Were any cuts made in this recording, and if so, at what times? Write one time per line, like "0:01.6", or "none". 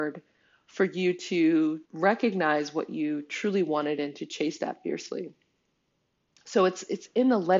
0:01.8